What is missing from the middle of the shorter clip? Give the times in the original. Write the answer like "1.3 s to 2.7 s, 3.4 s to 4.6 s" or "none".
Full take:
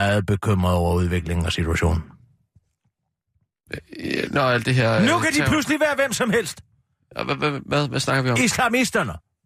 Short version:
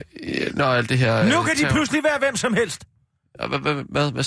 none